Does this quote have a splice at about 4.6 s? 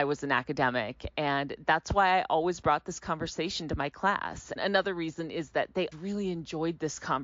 yes; 2 cuts; at 4.6 s, 5.9 s

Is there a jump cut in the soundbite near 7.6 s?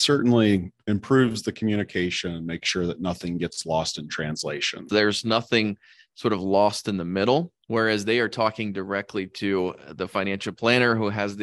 yes; 2 cuts; at 4.9 s, 7.6 s

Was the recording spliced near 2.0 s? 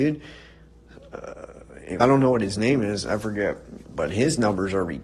yes; 1 cut; at 2.0 s

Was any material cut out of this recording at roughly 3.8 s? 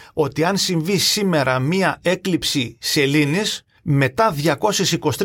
yes; 1 cut; at 3.8 s

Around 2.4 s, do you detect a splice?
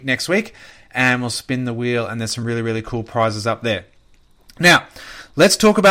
no; 0 cuts

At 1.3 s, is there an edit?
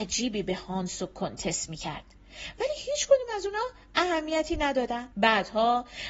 no; 1 cut; at 5.1 s

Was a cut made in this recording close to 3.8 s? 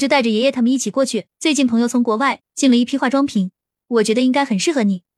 no; 1 cut; at 1.3 s

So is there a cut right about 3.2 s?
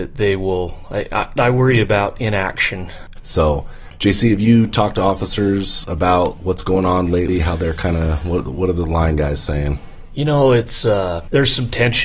yes; 1 cut; at 3.2 s

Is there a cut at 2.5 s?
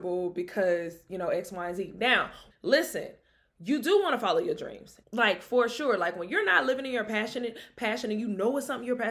yes; 2 cuts; at 2.5 s, 5.0 s

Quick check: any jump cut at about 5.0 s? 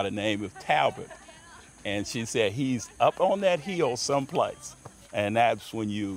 yes; 1 cut; at 5.0 s

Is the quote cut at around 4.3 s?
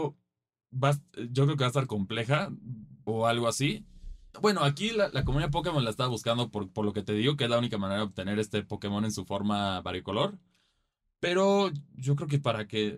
yes; 2 cuts; at 3.1 s, 4.3 s

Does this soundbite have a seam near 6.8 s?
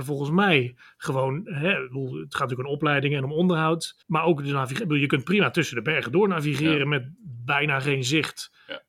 no; 1 cut; at 4.0 s

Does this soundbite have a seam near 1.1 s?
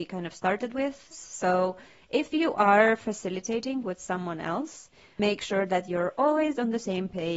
yes; 1 cut; at 1.1 s

